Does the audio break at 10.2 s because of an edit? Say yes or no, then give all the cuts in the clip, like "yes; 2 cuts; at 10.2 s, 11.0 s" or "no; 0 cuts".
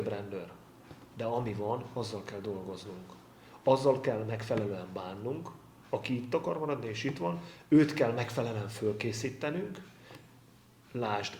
no; 0 cuts